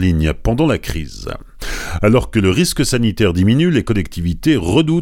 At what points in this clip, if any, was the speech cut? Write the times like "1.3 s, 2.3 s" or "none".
2.0 s

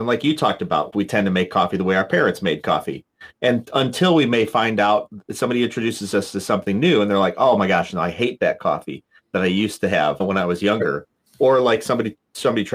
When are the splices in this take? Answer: 0.9 s

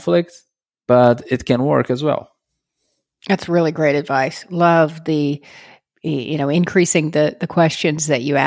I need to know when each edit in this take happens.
none

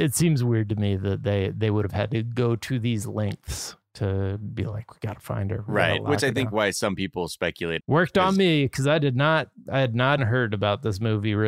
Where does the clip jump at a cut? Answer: 7.8 s, 10.2 s

